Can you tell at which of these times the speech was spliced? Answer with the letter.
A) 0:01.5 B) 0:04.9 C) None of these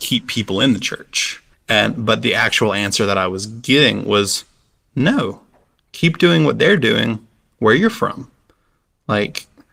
A